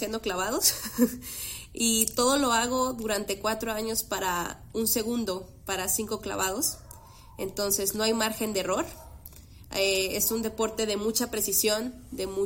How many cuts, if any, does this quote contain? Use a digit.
0